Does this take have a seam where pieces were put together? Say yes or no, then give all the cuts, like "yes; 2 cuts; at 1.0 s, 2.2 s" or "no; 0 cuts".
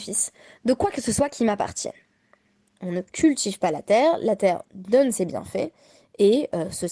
yes; 1 cut; at 2.8 s